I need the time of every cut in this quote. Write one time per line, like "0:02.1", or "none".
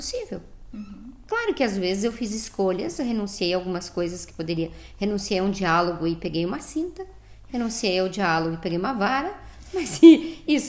none

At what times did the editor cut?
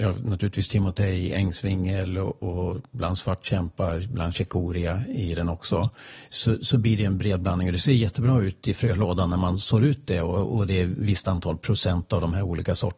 none

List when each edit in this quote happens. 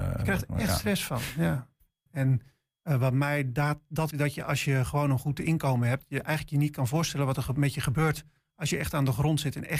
0:02.1
0:04.1

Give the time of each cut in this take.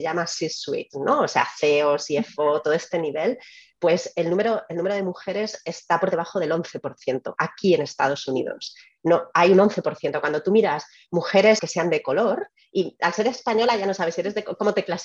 0:11.6

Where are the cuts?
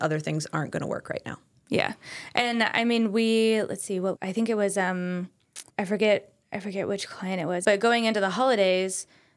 0:04.2
0:05.7
0:07.6

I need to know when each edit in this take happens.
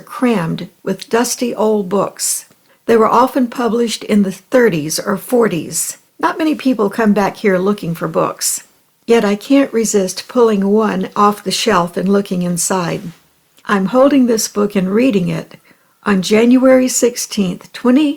0:02.7
0:06.1
0:13.6

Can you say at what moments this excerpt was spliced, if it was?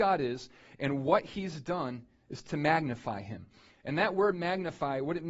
none

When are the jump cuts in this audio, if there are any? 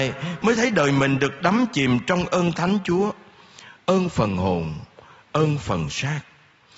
none

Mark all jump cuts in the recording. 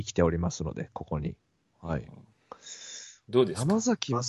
0:01.7

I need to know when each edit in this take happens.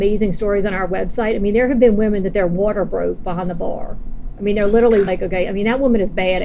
0:05.1

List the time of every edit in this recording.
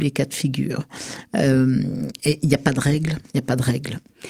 0:03.3

